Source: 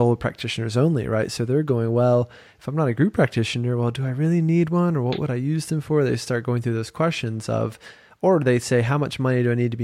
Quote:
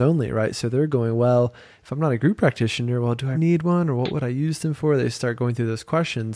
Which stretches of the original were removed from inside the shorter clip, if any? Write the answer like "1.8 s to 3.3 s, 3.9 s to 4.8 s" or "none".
4.1 s to 4.4 s